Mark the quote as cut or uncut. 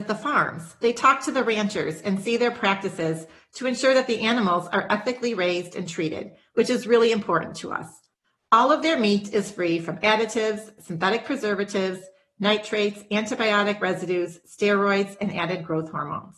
uncut